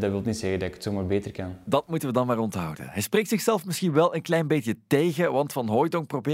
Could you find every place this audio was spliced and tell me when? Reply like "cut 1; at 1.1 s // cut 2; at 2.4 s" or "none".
none